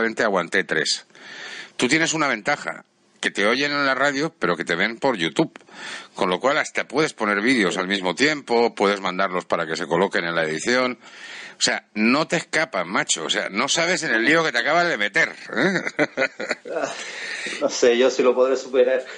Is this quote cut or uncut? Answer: uncut